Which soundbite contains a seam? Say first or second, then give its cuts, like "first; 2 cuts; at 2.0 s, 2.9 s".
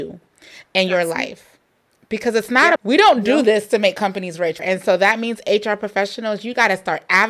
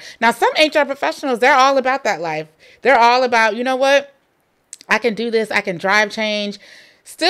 first; 2 cuts; at 2.8 s, 4.6 s